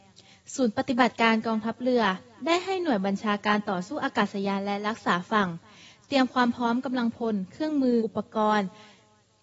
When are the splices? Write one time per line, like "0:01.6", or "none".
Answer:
0:08.0

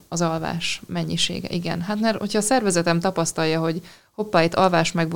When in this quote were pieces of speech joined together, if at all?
none

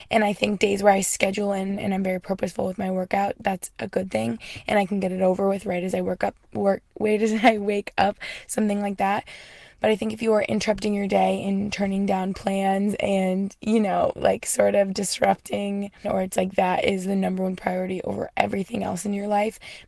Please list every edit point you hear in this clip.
0:16.0

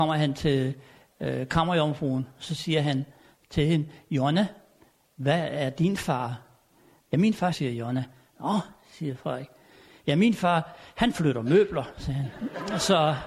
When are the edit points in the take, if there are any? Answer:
0:07.5

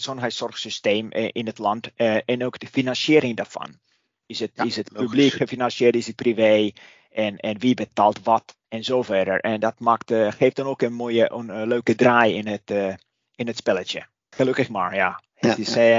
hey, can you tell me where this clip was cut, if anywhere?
0:08.6
0:14.3

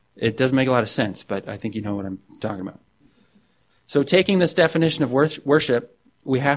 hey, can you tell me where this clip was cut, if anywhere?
0:03.7

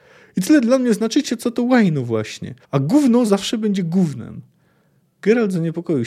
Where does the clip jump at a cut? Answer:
0:02.6

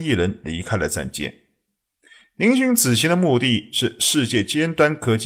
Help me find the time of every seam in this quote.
none

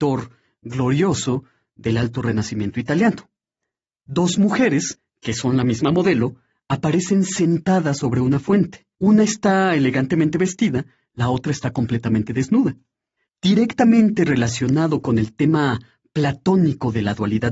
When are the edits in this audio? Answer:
0:08.9
0:13.3

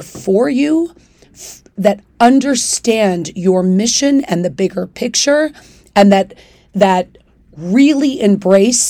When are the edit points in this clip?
0:01.8

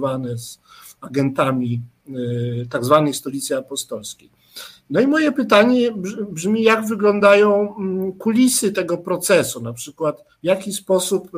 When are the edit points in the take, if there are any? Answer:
0:10.3

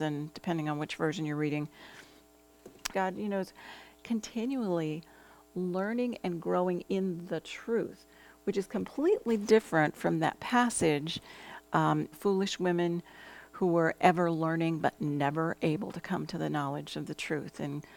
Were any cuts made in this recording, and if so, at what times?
0:02.9
0:12.1

